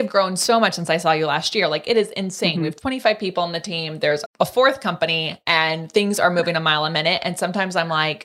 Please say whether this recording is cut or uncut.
cut